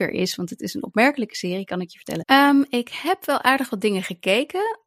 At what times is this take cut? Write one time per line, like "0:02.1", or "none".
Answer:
0:02.2